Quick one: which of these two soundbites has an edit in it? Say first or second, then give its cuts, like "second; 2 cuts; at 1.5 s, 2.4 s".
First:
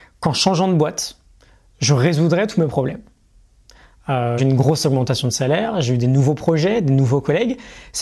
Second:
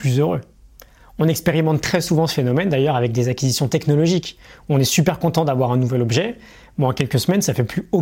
first; 1 cut; at 4.4 s